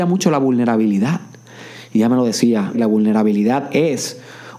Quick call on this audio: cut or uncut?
cut